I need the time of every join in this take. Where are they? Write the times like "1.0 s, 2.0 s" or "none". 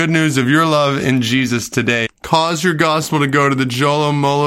2.1 s